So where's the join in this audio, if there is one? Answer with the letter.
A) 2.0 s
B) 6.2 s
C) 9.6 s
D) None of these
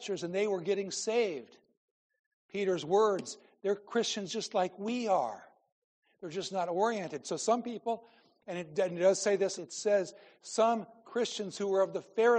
C